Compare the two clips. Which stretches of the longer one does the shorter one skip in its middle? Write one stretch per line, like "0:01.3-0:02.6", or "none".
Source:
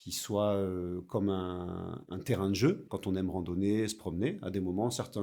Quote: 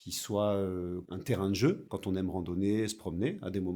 0:01.0-0:02.0